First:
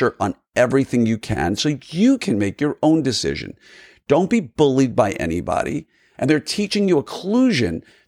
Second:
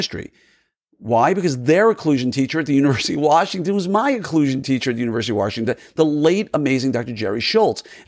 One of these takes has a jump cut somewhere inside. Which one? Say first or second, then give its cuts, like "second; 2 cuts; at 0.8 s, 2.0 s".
first; 1 cut; at 6.1 s